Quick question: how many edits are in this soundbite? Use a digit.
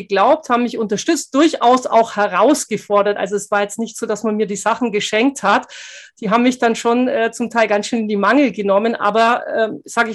0